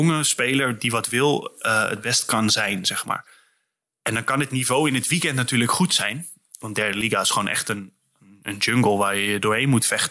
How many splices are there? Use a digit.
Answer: 0